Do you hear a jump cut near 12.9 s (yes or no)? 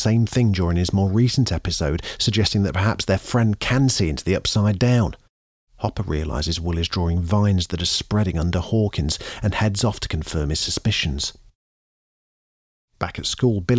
no